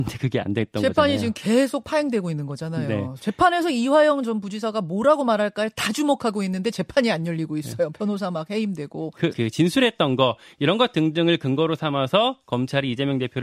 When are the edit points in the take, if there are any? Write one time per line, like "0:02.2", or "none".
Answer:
0:09.3